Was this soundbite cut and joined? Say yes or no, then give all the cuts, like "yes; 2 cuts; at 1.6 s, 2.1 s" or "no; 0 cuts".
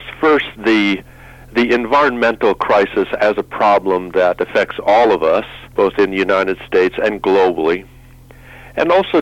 yes; 1 cut; at 5.7 s